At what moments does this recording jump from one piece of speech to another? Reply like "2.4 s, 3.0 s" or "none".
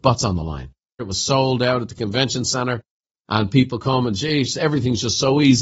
1.0 s